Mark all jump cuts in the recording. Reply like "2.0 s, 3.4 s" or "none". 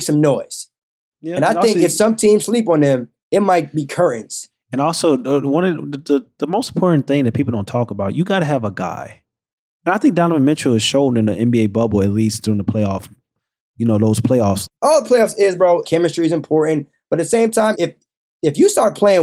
14.7 s, 15.8 s, 17.7 s